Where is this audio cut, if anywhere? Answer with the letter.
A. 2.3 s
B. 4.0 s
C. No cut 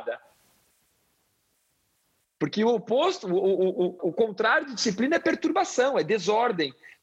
B